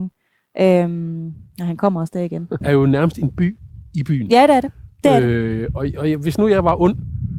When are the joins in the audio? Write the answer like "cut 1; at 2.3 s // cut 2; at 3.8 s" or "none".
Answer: cut 1; at 2.6 s